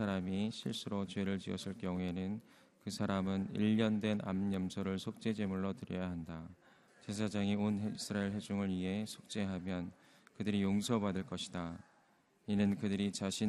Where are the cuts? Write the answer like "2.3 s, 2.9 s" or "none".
6.9 s